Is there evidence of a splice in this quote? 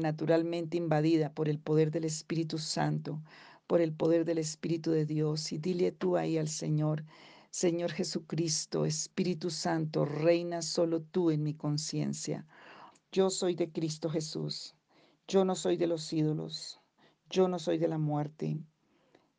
yes; 1 cut; at 12.9 s

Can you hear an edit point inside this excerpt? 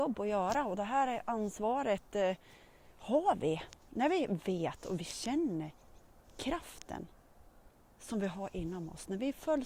no; 0 cuts

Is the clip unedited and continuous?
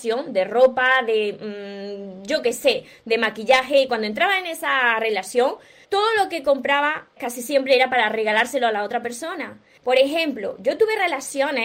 no; 3 cuts; at 5.8 s, 7.2 s, 9.8 s

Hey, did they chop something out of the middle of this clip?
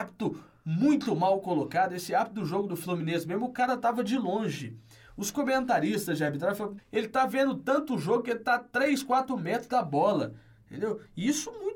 yes; 1 cut; at 6.8 s

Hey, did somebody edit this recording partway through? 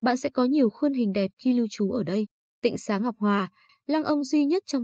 yes; 2 cuts; at 2.4 s, 3.7 s

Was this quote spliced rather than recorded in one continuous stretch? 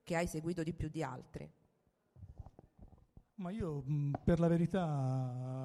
yes; 1 cut; at 3.3 s

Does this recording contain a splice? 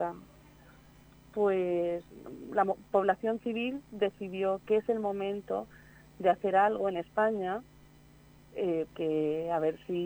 yes; 2 cuts; at 4.6 s, 8.9 s

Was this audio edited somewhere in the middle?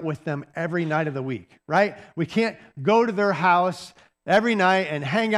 no; 0 cuts

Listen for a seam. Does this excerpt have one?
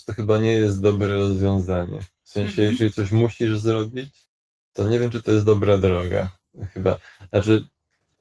no; 0 cuts

